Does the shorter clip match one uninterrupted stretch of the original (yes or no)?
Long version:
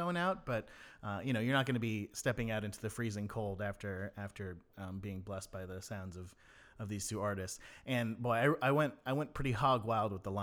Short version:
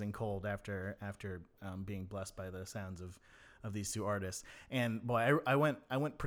yes